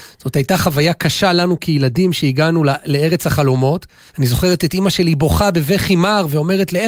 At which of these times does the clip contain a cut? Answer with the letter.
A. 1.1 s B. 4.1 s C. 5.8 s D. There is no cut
B